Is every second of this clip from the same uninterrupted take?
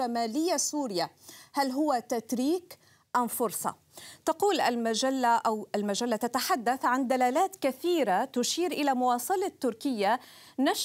yes; 0 cuts

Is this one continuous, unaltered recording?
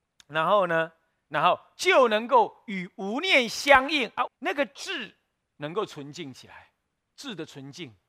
no; 1 cut; at 4.3 s

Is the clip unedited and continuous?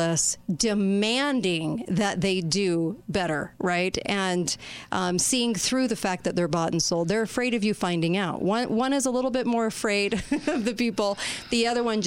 yes; 0 cuts

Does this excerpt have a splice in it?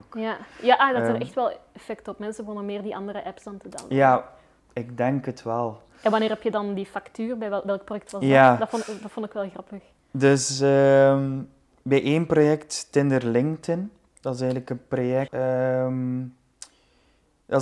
yes; 2 cuts; at 4.6 s, 15.3 s

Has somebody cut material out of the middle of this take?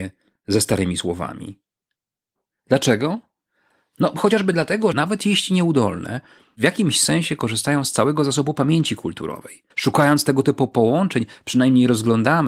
yes; 2 cuts; at 4.9 s, 9.7 s

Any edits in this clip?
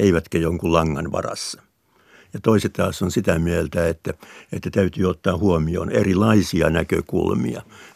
no; 0 cuts

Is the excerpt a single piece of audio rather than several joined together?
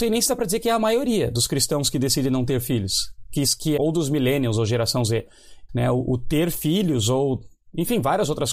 no; 2 cuts; at 3.8 s, 5.7 s

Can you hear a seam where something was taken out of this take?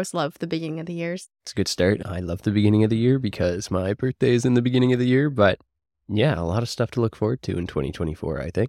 no; 0 cuts

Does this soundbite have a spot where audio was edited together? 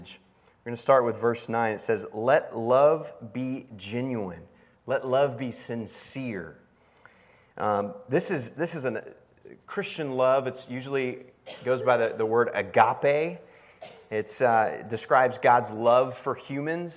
no; 0 cuts

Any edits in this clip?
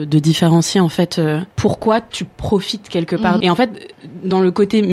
yes; 2 cuts; at 1.5 s, 3.4 s

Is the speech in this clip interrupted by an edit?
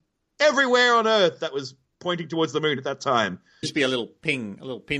yes; 1 cut; at 3.6 s

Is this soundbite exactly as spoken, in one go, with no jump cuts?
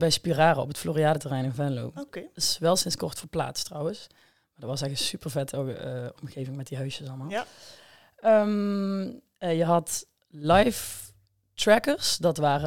yes; 0 cuts

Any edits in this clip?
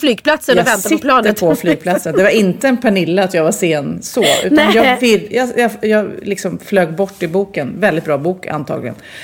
no; 0 cuts

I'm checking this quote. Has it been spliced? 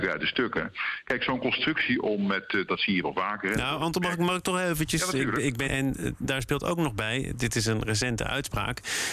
yes; 2 cuts; at 2.7 s, 5.7 s

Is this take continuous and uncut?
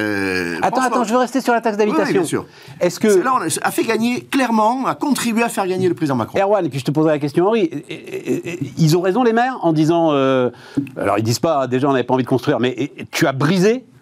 yes; 0 cuts

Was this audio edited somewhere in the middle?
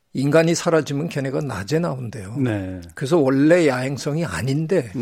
no; 0 cuts

